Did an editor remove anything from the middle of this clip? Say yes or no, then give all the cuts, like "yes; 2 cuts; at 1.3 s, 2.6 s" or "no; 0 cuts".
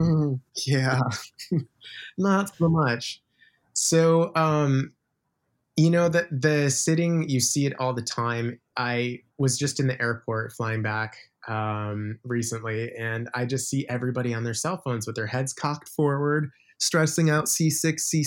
yes; 1 cut; at 9.3 s